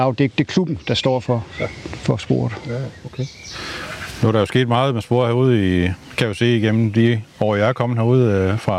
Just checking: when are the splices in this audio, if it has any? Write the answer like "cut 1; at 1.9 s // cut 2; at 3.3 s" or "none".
none